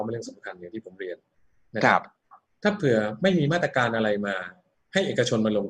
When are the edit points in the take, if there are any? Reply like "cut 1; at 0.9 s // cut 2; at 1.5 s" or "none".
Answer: none